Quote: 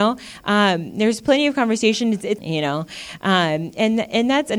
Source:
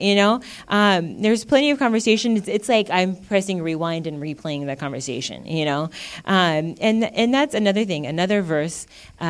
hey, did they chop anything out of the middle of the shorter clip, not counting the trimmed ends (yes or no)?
yes